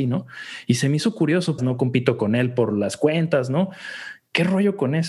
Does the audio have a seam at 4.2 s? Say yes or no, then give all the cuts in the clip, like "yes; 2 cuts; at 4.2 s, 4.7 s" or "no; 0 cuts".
no; 1 cut; at 1.6 s